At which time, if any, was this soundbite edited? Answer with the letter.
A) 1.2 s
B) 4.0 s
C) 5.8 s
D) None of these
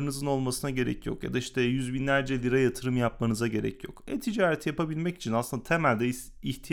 D